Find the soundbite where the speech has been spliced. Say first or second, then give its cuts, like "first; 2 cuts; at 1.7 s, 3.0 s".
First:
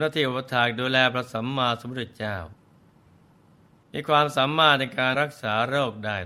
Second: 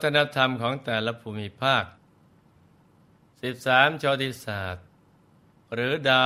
first; 1 cut; at 5.1 s